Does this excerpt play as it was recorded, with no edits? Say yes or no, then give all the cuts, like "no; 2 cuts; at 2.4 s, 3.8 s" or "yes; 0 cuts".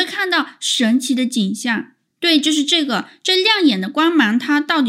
yes; 0 cuts